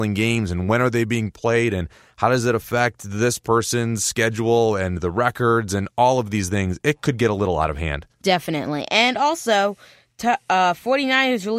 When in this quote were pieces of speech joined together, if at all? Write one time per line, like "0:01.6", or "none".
none